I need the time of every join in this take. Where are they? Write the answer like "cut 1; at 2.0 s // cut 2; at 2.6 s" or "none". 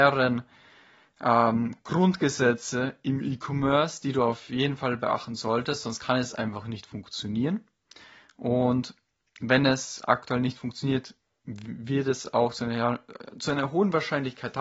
none